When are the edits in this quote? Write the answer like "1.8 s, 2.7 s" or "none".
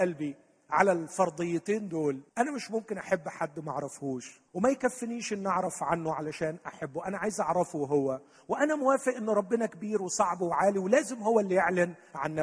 2.3 s, 4.5 s

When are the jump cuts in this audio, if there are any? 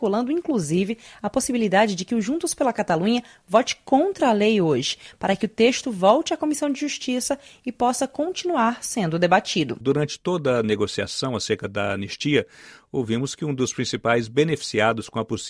9.8 s

